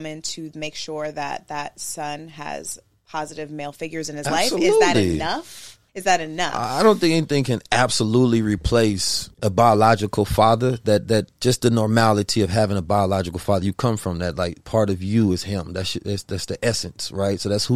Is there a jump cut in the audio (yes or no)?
yes